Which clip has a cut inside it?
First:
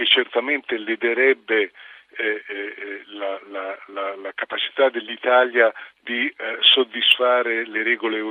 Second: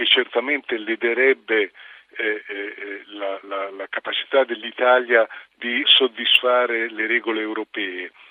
second; 2 cuts; at 3.4 s, 5.8 s

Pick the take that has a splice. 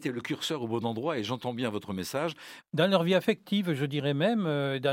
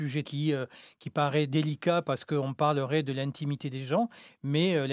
first; 1 cut; at 2.6 s

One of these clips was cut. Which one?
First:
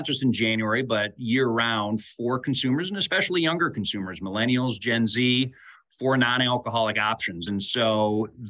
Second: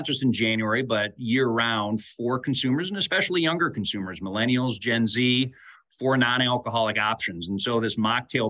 first; 1 cut; at 7.5 s

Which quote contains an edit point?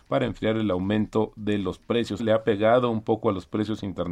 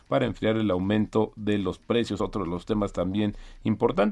first; 1 cut; at 2.2 s

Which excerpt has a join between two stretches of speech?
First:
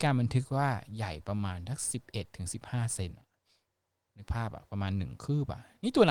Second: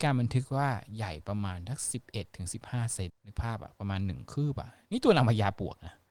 second; 1 cut; at 3.1 s

